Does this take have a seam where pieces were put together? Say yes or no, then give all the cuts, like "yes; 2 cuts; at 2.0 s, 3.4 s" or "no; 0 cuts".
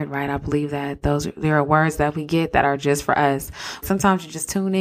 yes; 1 cut; at 3.8 s